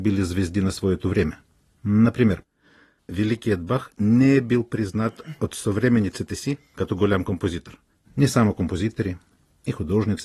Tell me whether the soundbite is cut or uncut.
cut